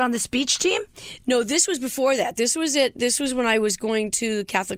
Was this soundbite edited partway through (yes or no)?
no